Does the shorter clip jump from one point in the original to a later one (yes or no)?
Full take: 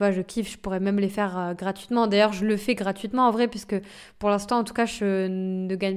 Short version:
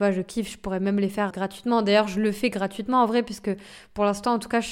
yes